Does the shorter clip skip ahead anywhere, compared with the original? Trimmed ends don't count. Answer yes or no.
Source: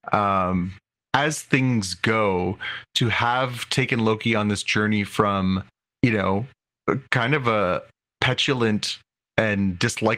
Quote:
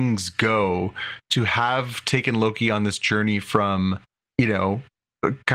no